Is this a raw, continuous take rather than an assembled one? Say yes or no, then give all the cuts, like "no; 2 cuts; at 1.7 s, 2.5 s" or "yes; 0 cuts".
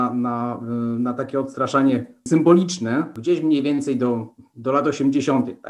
no; 1 cut; at 2.3 s